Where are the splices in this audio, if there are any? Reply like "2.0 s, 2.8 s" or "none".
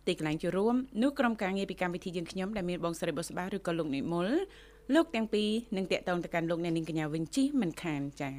none

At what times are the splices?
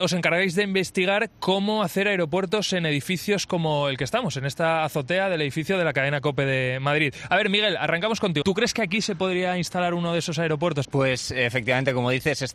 8.4 s, 10.8 s

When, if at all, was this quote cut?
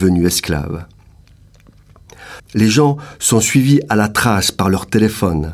2.4 s

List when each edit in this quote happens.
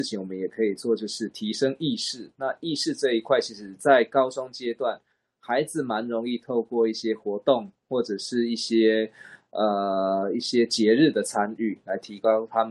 none

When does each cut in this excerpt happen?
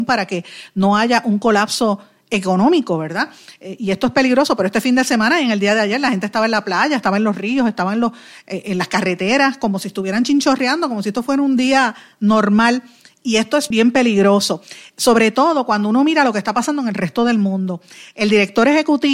13.7 s

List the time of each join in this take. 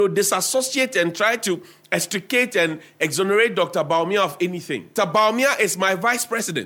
5.0 s

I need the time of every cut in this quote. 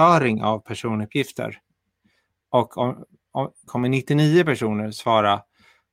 3.7 s

